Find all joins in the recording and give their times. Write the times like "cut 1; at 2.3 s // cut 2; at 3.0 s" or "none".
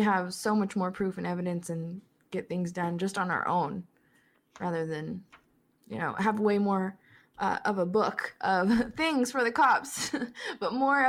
none